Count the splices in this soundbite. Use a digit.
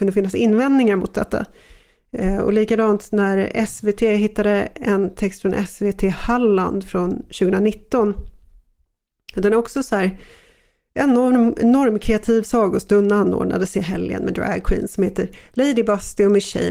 0